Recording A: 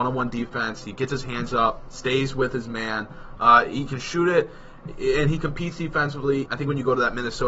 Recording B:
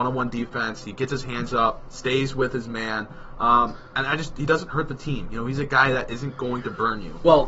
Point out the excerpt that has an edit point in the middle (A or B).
A